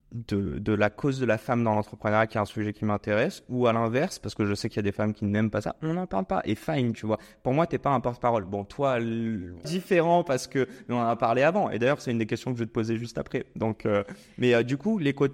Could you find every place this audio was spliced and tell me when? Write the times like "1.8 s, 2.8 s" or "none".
9.6 s